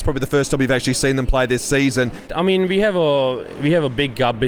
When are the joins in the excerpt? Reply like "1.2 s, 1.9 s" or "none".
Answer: 2.3 s